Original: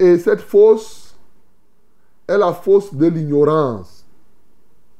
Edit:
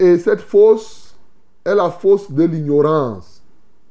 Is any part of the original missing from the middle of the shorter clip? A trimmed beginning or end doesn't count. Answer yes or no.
yes